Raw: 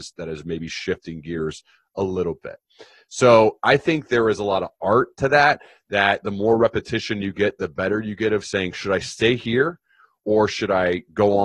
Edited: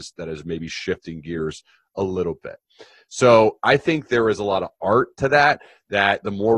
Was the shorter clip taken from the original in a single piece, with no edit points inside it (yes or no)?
yes